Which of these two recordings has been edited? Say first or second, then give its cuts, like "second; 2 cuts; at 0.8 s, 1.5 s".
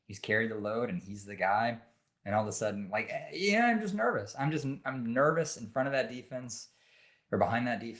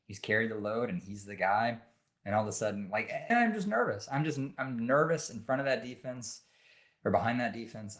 second; 1 cut; at 3.3 s